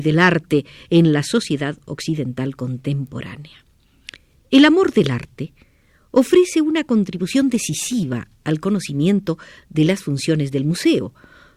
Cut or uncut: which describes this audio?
uncut